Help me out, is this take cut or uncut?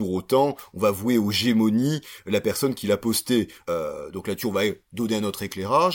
cut